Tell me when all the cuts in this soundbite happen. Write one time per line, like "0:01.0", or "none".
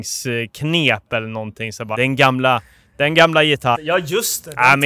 0:01.9
0:03.7

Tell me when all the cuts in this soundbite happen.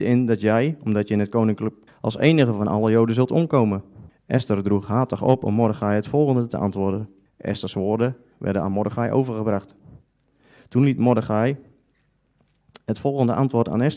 0:01.9
0:04.1
0:07.3

